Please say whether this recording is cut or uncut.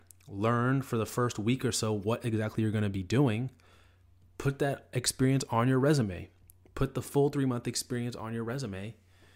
uncut